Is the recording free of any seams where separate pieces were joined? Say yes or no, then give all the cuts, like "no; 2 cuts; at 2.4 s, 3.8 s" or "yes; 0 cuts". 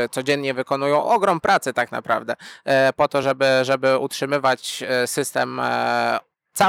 yes; 0 cuts